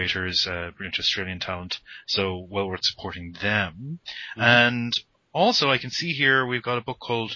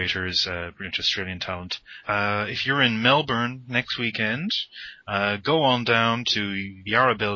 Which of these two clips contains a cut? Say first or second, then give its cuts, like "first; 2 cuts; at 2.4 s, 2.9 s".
second; 1 cut; at 2.0 s